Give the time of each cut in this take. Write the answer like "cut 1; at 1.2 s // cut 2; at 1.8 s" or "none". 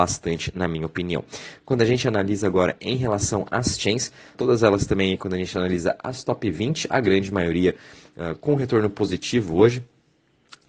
cut 1; at 4.3 s